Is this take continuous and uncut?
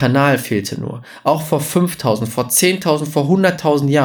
yes; 0 cuts

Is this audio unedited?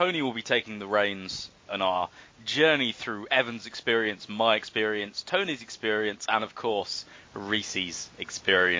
yes; 0 cuts

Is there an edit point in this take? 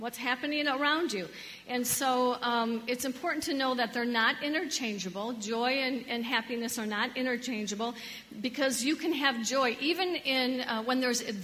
no; 0 cuts

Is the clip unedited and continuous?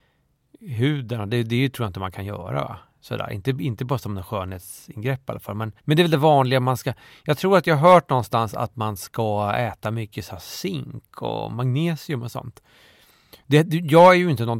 no; 1 cut; at 5.8 s

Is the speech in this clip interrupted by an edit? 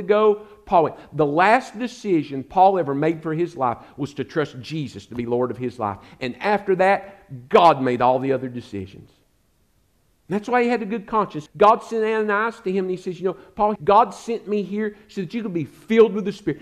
yes; 2 cuts; at 11.5 s, 13.8 s

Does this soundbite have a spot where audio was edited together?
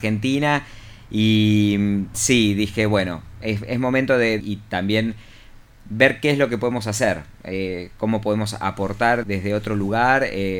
yes; 3 cuts; at 2.1 s, 4.4 s, 9.2 s

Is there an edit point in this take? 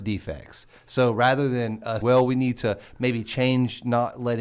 yes; 1 cut; at 2.0 s

